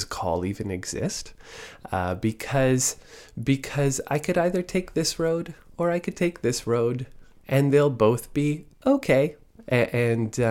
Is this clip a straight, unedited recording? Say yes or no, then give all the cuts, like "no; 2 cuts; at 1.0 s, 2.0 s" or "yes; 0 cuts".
yes; 0 cuts